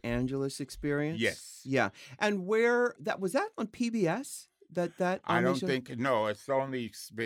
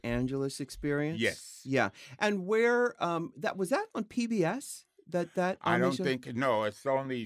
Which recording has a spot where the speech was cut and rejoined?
first; 1 cut; at 3.0 s

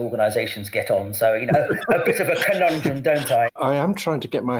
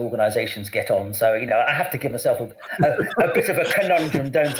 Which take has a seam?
first; 2 cuts; at 1.5 s, 3.5 s

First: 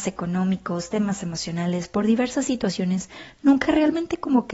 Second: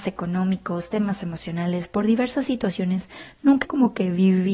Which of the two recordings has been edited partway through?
second; 1 cut; at 3.6 s

